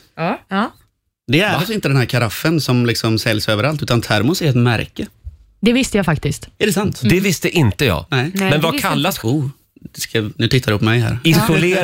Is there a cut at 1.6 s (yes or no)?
no